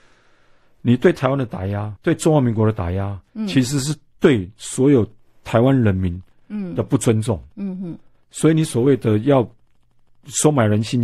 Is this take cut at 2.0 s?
yes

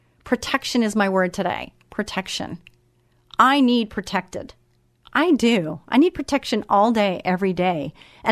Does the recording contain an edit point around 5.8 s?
no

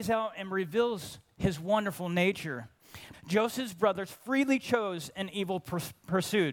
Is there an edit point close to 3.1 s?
yes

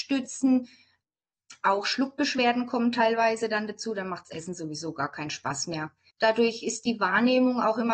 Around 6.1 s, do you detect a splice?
yes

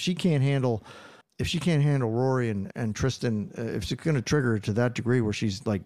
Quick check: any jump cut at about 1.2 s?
yes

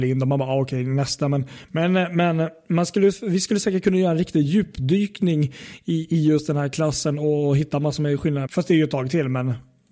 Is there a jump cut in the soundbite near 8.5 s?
yes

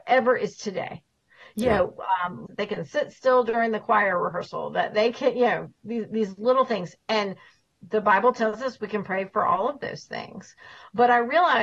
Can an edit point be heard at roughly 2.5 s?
yes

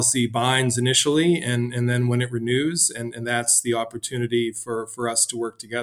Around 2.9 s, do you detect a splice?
no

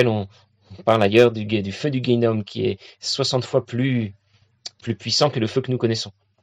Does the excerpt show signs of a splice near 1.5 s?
no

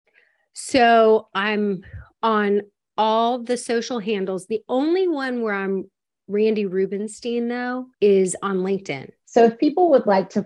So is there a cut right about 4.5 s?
no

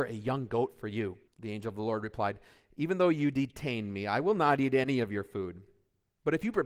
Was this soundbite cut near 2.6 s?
no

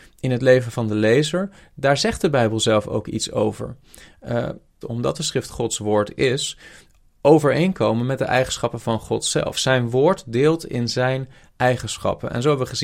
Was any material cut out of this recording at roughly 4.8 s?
yes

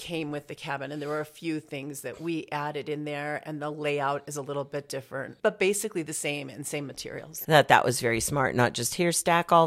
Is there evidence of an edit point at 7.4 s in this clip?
yes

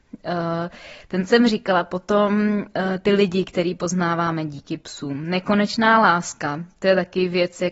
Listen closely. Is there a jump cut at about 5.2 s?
no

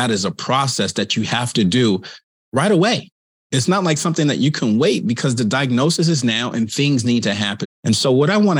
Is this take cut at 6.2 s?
no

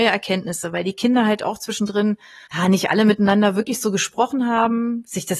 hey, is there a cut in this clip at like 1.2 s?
no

